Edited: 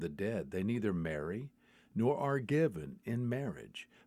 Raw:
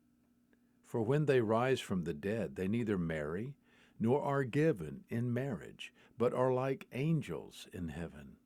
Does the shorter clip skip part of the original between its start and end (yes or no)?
no